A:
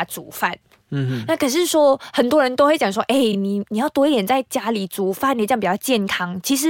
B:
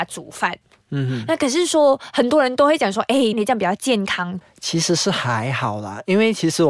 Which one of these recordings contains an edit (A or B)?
B